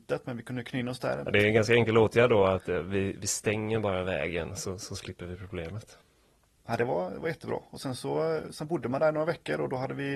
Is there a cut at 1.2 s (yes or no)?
yes